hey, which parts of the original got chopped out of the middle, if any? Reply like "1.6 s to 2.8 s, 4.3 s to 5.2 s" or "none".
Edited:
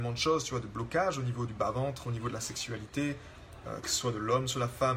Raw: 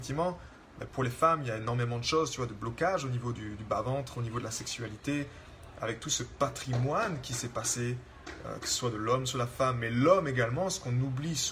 3.3 s to 3.6 s, 5.7 s to 8.4 s

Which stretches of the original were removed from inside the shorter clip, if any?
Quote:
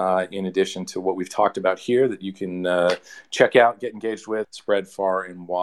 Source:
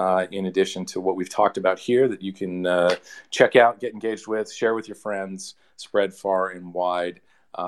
4.4 s to 5.7 s

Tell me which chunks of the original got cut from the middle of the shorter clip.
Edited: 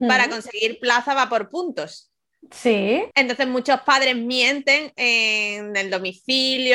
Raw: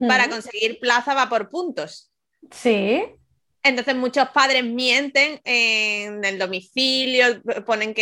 3.1 s to 3.6 s

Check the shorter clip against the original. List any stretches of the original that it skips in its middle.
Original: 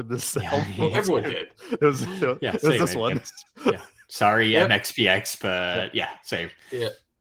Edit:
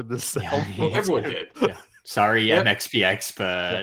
1.5 s to 3.6 s

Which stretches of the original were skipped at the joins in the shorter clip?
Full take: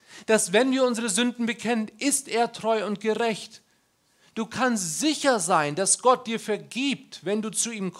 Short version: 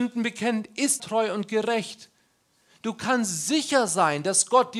2.2 s to 2.5 s

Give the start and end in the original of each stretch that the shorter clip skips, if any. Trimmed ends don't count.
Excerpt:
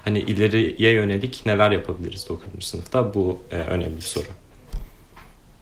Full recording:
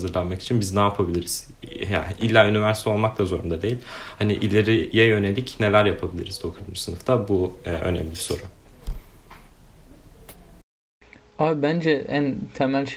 none

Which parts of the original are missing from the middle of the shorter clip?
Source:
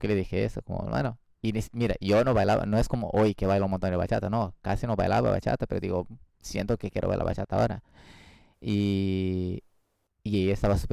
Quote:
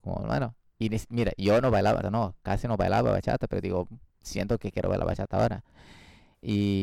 2.7 s to 4.2 s

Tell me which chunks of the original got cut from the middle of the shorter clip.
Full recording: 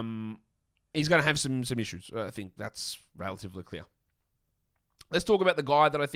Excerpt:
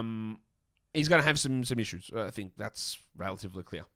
none

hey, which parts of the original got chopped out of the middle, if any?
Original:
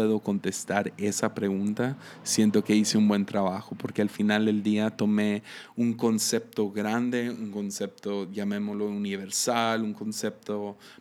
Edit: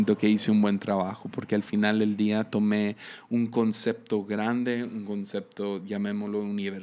none

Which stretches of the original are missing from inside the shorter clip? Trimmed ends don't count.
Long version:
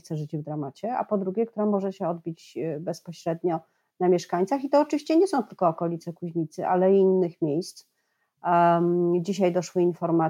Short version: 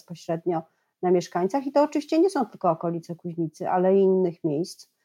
none

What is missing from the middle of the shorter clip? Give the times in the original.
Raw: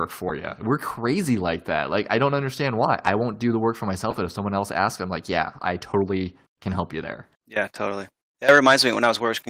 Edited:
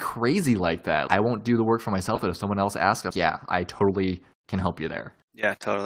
1.9 s to 3.0 s, 5.1 s to 5.2 s

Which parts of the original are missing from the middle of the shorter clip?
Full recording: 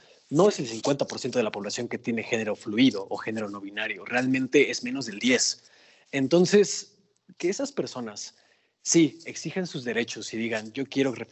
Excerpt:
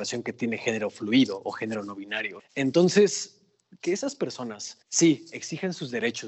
4.0 s to 6.0 s, 8.4 s to 8.7 s

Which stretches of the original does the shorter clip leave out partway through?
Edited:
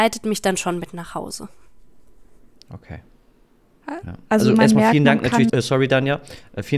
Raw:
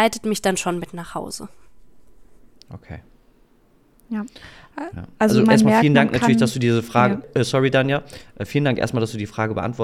3.8 s to 4.7 s, 6.4 s to 7.3 s

